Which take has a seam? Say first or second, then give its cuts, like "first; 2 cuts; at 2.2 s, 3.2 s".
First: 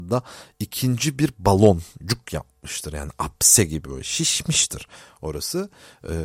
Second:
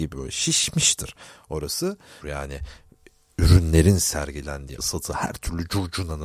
second; 2 cuts; at 2.2 s, 4.8 s